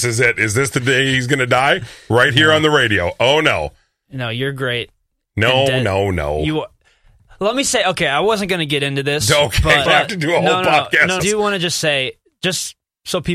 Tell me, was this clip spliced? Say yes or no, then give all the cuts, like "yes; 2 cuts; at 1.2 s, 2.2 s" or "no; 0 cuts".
yes; 2 cuts; at 9.9 s, 11.2 s